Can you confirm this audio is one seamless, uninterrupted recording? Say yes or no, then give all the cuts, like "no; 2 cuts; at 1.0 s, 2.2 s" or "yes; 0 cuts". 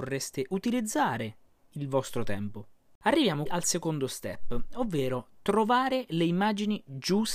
no; 1 cut; at 3.5 s